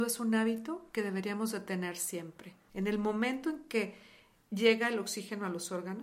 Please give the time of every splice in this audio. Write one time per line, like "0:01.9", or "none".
0:02.7